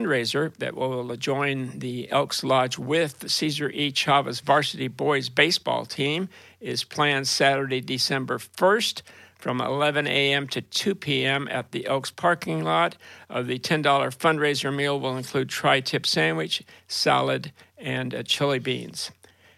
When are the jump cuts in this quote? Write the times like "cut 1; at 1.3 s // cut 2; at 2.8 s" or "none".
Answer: none